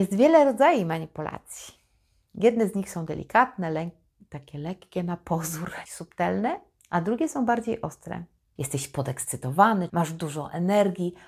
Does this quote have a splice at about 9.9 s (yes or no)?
yes